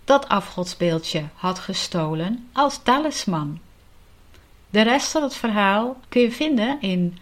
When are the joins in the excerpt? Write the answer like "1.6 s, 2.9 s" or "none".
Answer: 6.0 s